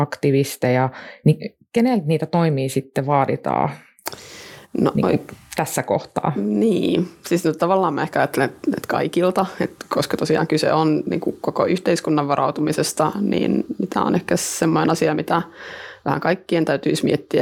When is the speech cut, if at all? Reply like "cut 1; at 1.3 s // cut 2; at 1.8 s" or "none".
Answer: none